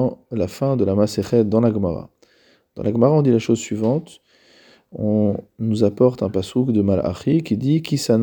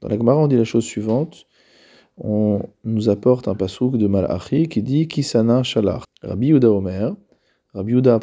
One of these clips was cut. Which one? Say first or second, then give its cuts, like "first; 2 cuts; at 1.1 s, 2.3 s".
second; 1 cut; at 6.0 s